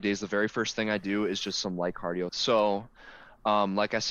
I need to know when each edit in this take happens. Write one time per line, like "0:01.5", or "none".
0:02.3